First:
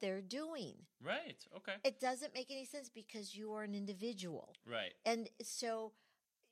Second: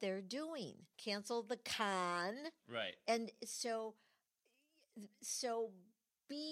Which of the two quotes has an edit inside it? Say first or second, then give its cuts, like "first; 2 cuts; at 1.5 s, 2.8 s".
second; 2 cuts; at 0.9 s, 2.6 s